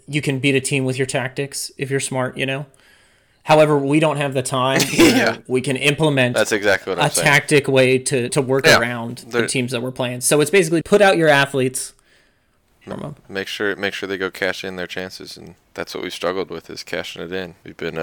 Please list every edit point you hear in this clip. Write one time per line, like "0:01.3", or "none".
0:08.3
0:10.8
0:12.9

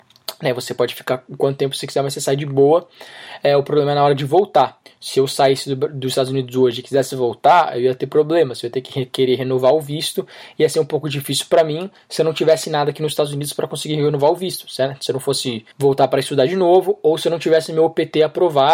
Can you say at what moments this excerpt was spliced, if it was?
0:15.7

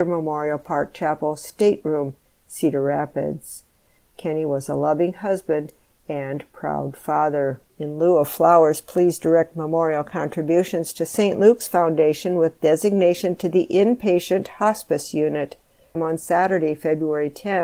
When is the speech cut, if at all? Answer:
0:07.7
0:15.9

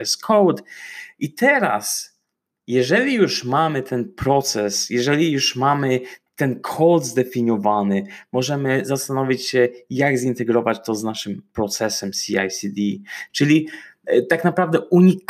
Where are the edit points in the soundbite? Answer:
0:13.3

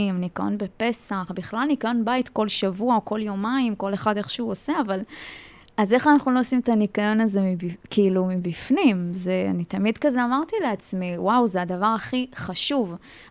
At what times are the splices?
none

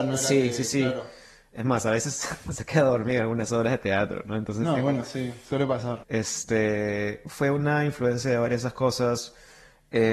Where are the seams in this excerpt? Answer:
0:06.0

